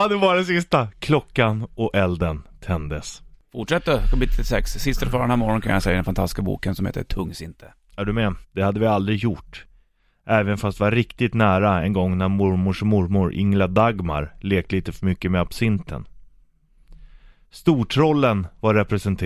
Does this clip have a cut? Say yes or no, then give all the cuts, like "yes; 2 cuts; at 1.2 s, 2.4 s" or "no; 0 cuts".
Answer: yes; 1 cut; at 8.4 s